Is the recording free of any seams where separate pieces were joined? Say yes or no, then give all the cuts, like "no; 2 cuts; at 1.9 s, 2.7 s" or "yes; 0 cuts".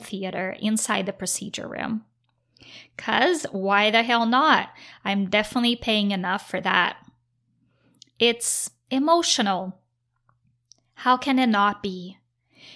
yes; 0 cuts